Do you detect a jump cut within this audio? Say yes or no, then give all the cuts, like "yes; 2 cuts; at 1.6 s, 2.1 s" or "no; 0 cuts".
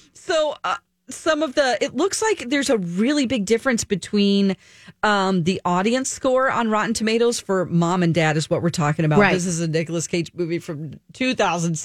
no; 0 cuts